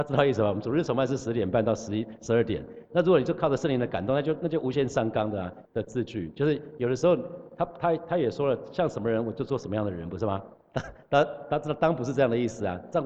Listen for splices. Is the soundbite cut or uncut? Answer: cut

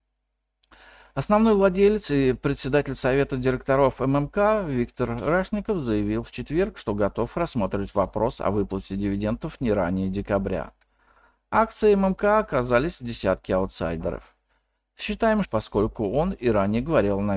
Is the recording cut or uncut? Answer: cut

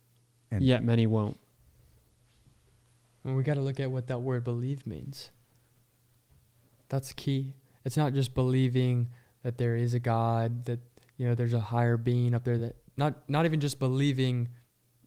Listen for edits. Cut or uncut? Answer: uncut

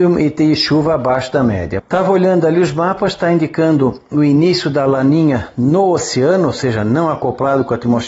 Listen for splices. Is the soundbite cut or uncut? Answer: cut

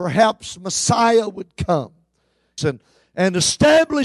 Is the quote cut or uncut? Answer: cut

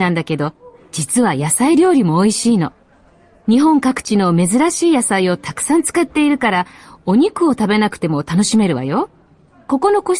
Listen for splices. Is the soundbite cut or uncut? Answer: uncut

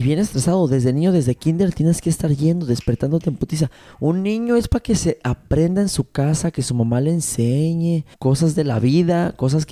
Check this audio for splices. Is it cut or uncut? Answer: cut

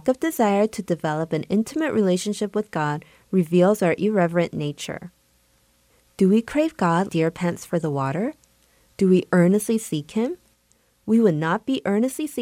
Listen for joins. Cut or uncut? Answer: cut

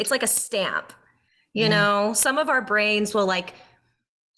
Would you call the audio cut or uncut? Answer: uncut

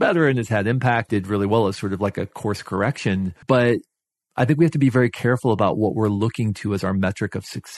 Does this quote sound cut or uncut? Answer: cut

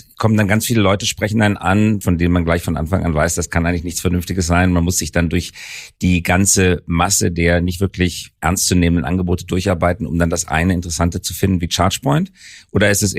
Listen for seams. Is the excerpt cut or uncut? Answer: cut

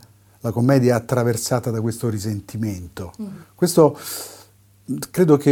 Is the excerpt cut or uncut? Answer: cut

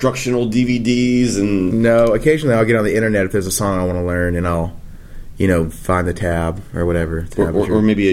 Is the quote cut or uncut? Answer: uncut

